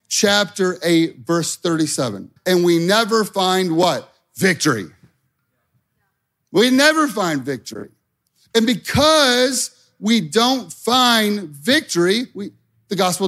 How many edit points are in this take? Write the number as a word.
one